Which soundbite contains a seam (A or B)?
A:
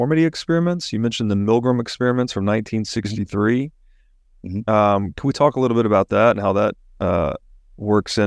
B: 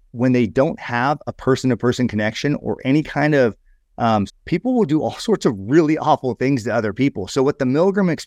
B